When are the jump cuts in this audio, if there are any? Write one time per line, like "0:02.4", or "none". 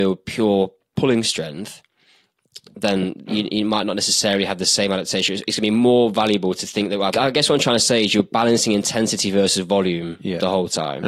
0:07.1